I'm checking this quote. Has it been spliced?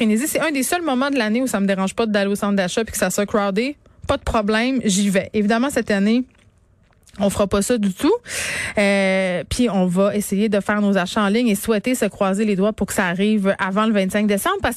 no; 0 cuts

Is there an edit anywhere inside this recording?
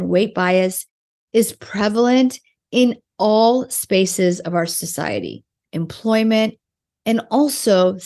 yes; 1 cut; at 5.6 s

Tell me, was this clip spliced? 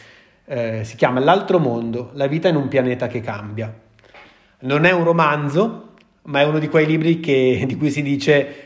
no; 0 cuts

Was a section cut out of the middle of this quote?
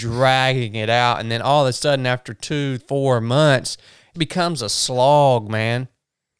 yes; 2 cuts; at 2.8 s, 4.1 s

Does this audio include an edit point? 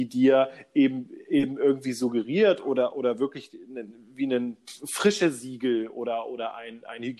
no; 0 cuts

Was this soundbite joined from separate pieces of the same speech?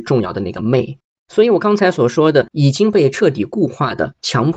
yes; 2 cuts; at 1.2 s, 2.5 s

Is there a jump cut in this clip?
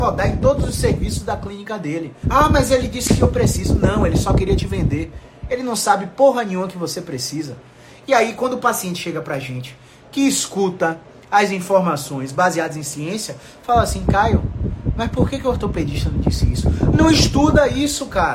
yes; 1 cut; at 2.2 s

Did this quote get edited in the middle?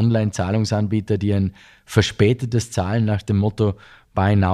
no; 0 cuts

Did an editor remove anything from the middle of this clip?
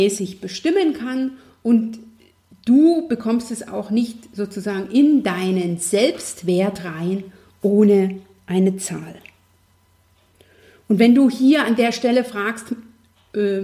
no; 0 cuts

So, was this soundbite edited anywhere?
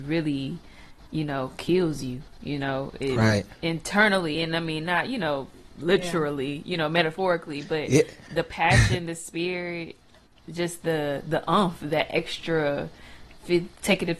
no; 0 cuts

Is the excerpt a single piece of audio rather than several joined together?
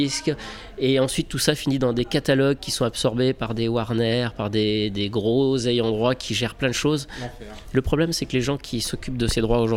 yes; 0 cuts

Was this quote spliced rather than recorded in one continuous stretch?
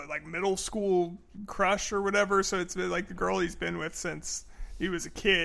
no; 0 cuts

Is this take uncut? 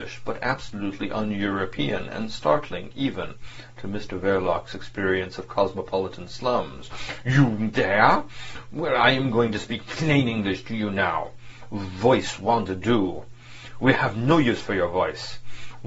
yes; 0 cuts

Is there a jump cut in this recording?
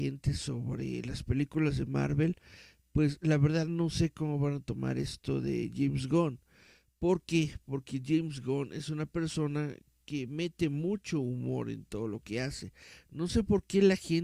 no; 0 cuts

